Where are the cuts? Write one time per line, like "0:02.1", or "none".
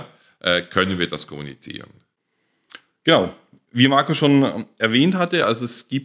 none